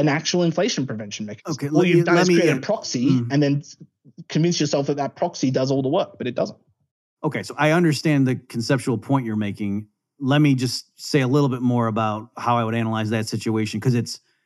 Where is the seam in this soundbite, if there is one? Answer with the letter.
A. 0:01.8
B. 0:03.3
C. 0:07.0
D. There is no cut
D